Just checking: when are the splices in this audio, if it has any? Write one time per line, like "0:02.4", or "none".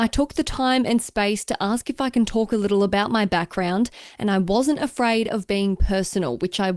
none